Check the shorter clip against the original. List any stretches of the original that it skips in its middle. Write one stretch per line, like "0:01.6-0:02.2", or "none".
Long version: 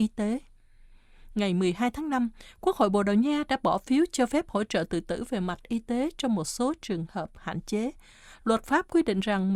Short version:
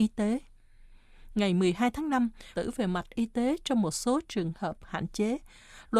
0:02.6-0:05.1